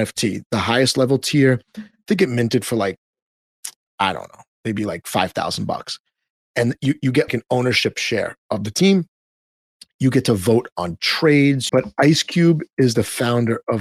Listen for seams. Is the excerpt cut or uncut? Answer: cut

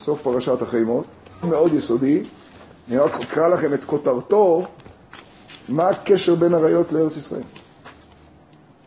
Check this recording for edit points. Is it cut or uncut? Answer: cut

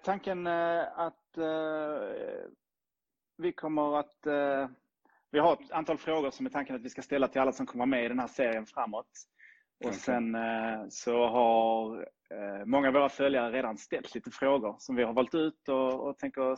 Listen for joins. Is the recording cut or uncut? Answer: uncut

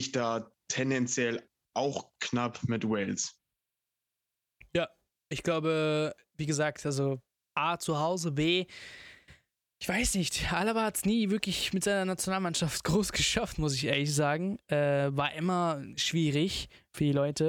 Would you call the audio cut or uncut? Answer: uncut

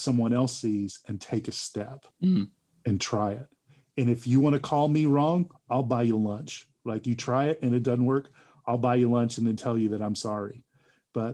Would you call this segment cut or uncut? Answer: cut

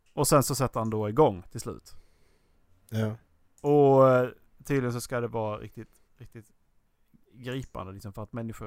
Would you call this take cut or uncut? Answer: cut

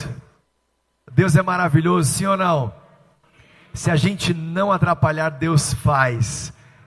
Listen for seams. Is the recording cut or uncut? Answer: uncut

